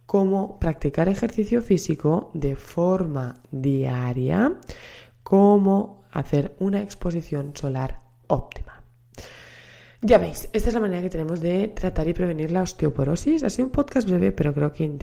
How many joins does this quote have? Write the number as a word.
zero